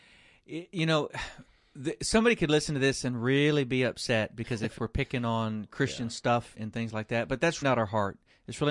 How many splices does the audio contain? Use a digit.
3